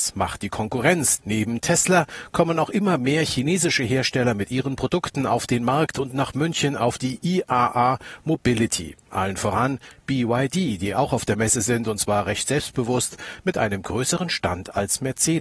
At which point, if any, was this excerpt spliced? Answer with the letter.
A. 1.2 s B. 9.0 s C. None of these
A